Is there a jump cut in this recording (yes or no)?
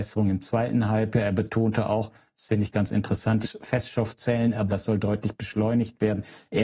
yes